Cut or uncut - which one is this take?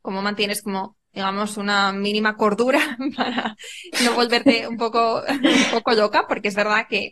uncut